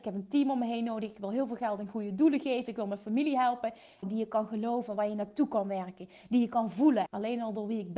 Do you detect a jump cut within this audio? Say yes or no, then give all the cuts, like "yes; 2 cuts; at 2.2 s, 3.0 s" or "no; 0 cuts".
yes; 2 cuts; at 4.0 s, 7.1 s